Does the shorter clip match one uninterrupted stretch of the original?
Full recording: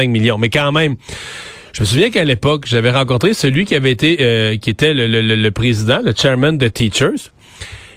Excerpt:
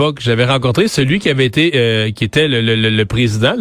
yes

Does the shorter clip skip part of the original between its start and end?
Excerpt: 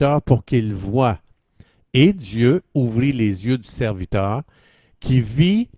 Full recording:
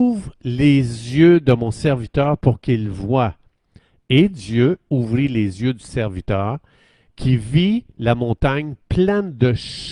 no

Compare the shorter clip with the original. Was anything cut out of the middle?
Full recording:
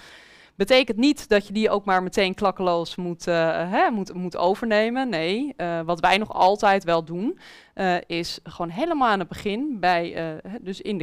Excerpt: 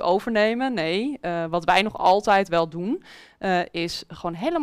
no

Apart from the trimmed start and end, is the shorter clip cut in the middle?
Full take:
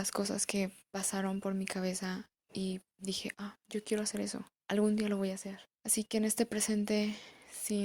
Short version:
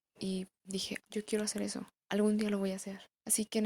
yes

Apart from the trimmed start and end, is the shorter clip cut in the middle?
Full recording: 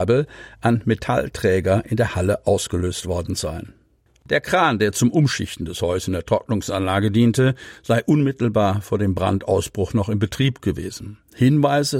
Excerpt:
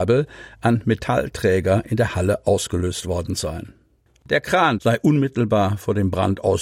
yes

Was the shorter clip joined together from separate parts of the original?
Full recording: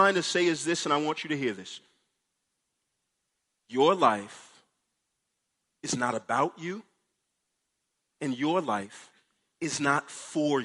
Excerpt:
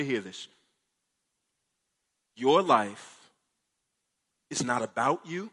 no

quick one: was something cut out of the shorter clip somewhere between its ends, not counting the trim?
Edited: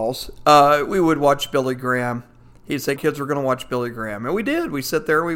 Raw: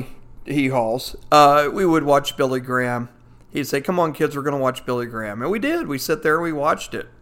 yes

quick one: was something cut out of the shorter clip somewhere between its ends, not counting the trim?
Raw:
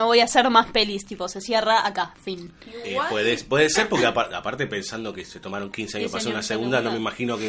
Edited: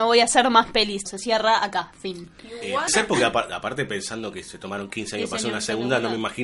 yes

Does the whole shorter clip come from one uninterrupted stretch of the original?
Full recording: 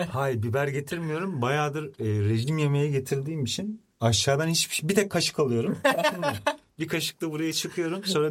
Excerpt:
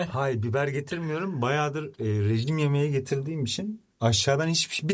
yes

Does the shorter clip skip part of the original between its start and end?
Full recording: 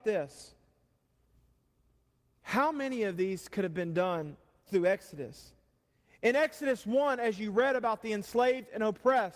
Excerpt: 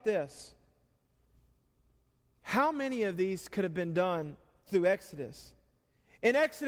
no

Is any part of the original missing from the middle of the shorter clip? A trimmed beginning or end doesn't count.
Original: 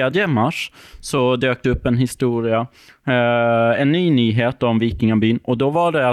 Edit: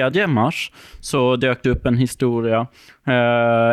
no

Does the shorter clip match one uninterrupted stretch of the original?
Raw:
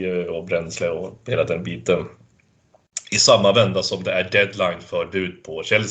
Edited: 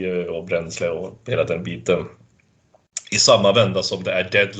yes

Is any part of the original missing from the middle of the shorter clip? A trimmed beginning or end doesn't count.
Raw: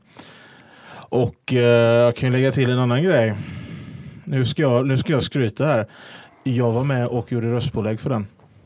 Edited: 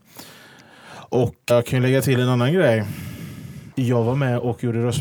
yes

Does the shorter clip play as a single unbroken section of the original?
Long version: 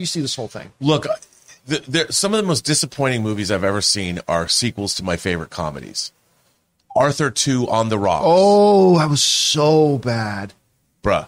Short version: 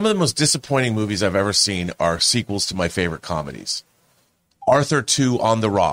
yes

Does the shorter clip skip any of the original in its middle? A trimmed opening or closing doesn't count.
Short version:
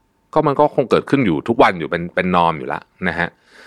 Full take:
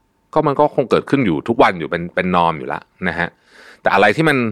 no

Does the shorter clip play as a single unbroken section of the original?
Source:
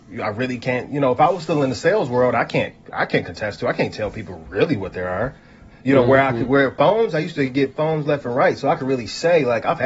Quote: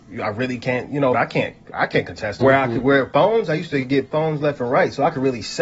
no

